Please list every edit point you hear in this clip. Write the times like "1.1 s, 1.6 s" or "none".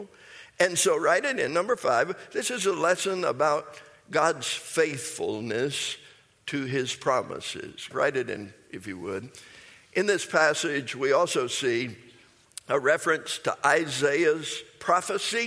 7.9 s